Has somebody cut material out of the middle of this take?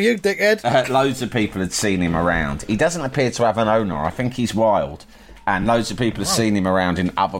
no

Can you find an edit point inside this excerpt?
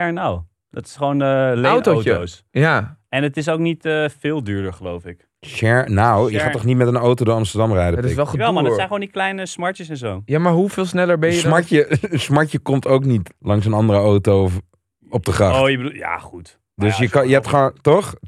yes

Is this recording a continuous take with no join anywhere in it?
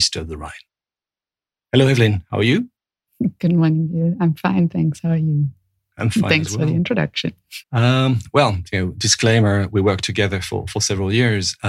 no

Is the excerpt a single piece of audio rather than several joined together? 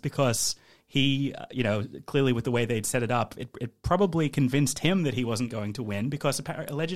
yes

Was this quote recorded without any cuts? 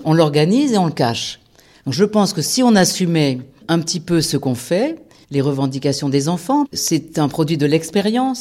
no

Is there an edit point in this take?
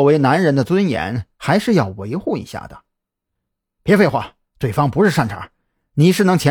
no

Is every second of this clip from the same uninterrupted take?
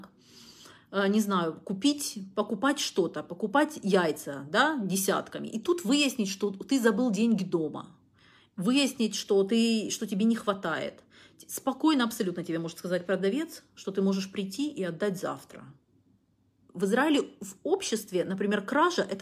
no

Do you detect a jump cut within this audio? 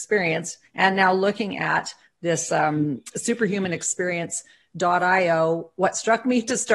no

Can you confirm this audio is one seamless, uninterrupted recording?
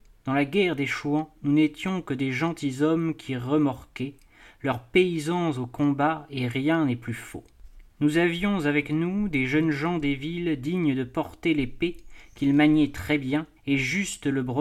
no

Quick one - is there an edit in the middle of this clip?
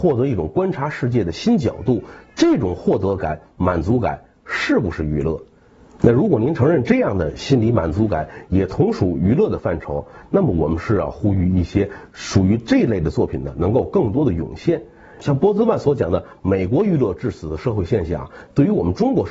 no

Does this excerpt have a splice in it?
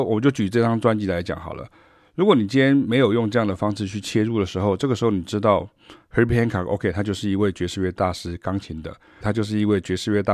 yes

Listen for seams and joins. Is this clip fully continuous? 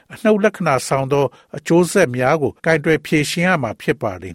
no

